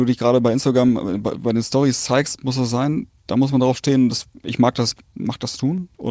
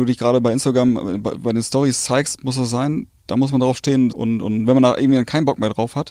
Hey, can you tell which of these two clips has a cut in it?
second; 1 cut; at 4.1 s

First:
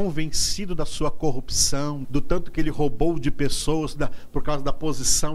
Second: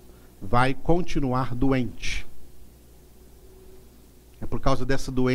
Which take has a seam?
first; 1 cut; at 2.0 s

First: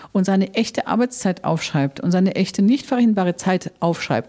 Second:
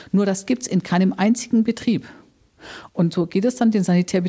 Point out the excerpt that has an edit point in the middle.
second; 1 cut; at 2.9 s

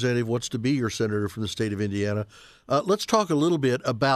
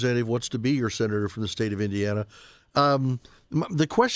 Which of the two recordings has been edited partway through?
second; 1 cut; at 2.6 s

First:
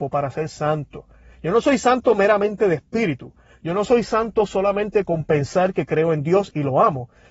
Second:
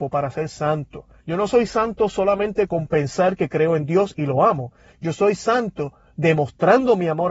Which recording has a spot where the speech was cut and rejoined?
second; 1 cut; at 1.2 s

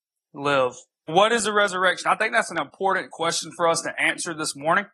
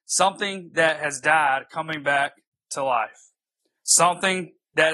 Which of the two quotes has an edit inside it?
first; 1 cut; at 1.1 s

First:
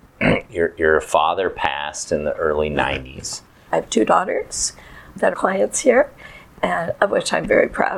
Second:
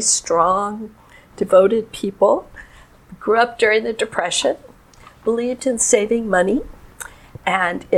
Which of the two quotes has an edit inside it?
first; 2 cuts; at 3.7 s, 5.3 s

